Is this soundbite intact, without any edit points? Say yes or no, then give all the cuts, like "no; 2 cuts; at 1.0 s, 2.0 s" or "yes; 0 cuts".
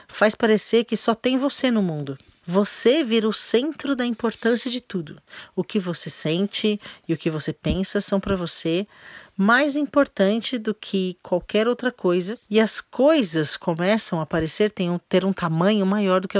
yes; 0 cuts